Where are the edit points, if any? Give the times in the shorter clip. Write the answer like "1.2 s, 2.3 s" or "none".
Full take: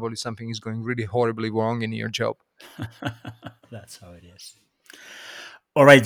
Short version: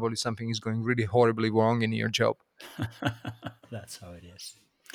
none